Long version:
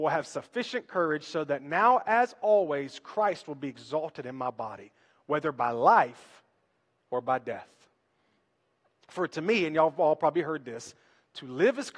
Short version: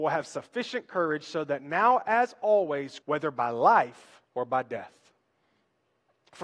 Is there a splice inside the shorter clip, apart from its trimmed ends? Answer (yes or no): yes